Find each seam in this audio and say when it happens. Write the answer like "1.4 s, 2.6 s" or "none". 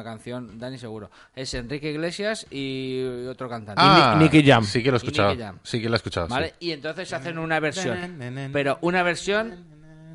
none